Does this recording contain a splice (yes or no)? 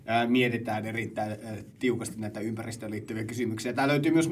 no